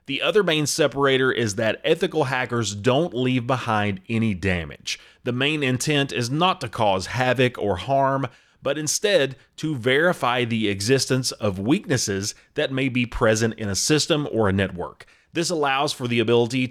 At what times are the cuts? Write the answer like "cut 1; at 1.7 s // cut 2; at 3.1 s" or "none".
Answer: none